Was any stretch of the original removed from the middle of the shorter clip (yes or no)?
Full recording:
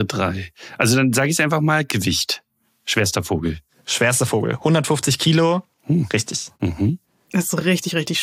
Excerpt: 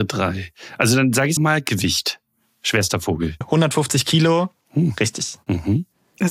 yes